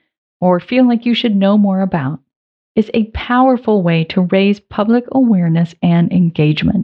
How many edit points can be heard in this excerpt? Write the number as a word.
zero